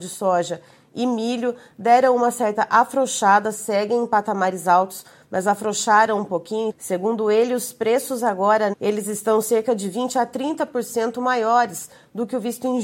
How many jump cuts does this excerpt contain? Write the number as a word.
two